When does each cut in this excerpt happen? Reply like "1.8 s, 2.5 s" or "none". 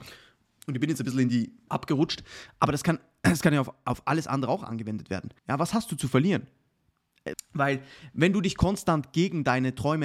1.7 s, 5.4 s, 7.3 s